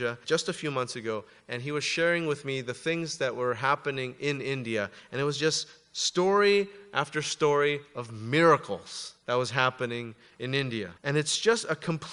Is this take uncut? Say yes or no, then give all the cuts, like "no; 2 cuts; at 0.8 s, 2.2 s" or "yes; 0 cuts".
no; 1 cut; at 11.0 s